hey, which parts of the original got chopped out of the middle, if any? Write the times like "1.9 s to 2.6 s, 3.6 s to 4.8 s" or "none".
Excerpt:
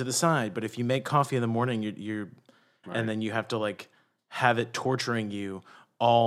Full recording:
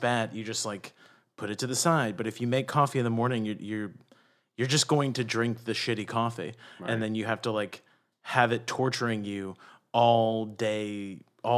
4.5 s to 6.8 s